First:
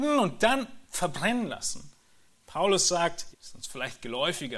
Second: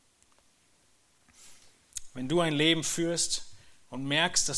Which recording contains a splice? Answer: first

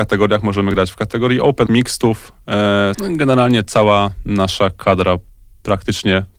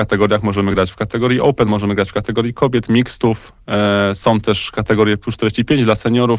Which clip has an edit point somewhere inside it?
first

